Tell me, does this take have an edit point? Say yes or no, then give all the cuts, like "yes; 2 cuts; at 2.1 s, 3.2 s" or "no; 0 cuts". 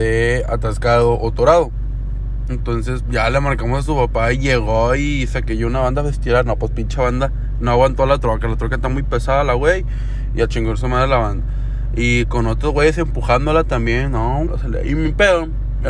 yes; 2 cuts; at 3.0 s, 14.5 s